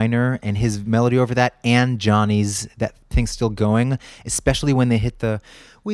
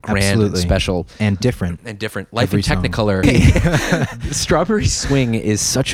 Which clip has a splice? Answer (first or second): second